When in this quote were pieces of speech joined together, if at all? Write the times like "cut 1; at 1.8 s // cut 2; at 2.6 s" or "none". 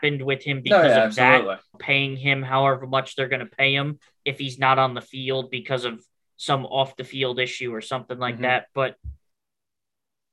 cut 1; at 1.7 s